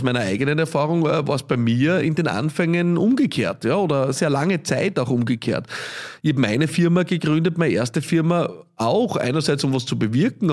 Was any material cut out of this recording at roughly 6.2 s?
no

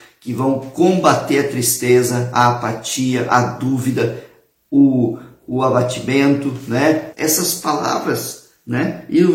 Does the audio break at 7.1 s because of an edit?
yes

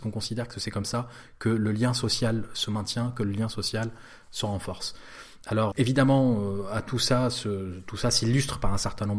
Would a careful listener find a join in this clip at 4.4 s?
no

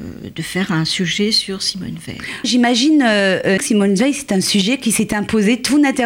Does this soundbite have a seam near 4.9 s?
no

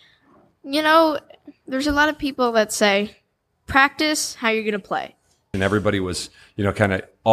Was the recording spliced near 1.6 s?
no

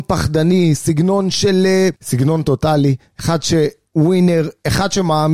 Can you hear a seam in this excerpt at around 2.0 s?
yes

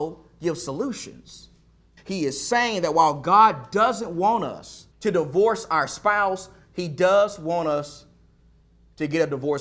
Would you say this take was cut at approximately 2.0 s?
yes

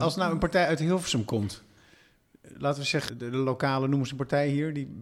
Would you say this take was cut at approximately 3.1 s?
yes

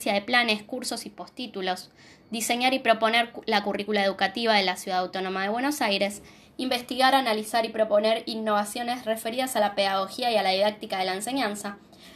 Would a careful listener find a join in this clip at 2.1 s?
no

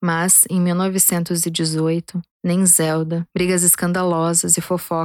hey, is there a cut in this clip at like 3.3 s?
yes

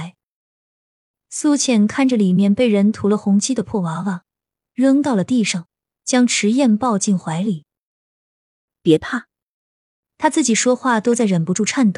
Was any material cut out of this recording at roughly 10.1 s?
no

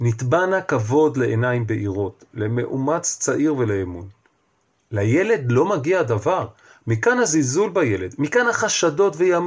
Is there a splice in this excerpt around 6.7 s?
no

